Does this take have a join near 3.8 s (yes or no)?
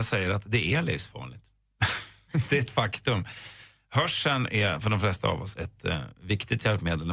no